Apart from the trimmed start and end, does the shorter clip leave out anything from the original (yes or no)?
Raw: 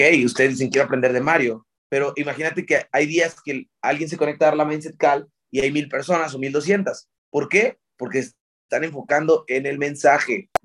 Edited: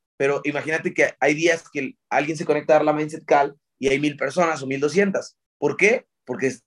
no